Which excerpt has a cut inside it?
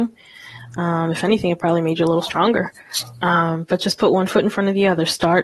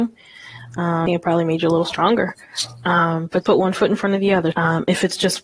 second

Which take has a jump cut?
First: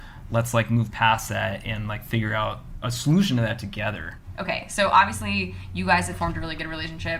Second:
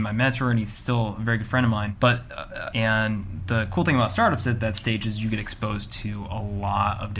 second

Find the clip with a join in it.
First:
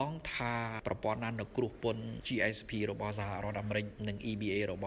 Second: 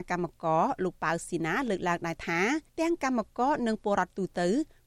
second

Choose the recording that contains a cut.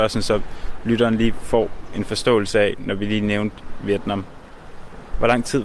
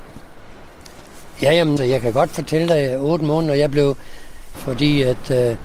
second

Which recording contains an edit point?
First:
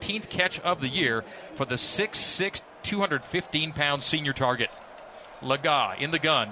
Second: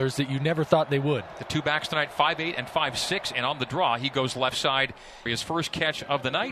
second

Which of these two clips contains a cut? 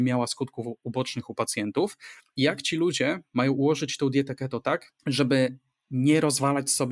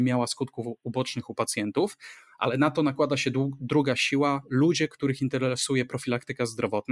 first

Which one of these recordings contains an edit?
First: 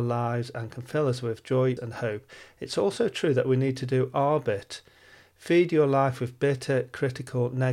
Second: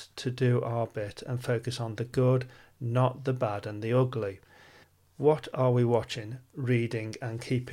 first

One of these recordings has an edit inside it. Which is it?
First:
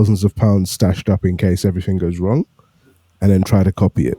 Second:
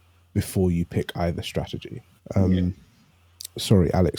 second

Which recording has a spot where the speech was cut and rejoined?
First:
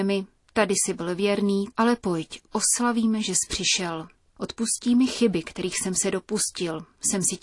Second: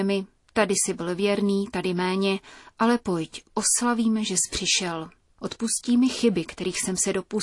first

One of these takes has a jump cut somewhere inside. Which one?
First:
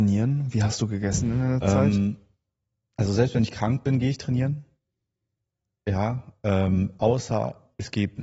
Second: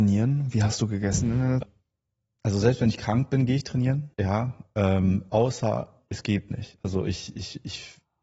second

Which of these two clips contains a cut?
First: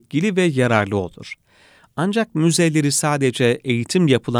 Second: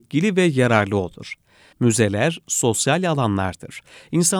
second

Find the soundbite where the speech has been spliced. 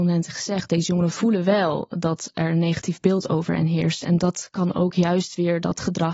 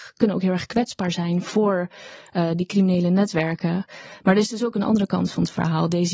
second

